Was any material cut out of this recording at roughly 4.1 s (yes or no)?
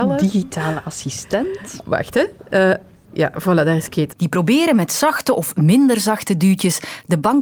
yes